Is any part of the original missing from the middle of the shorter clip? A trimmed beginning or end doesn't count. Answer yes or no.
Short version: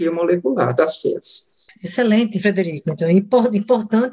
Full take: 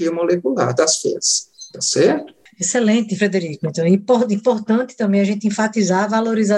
yes